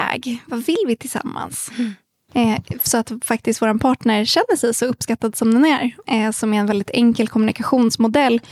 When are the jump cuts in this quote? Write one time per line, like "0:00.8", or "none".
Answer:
0:02.3
0:06.0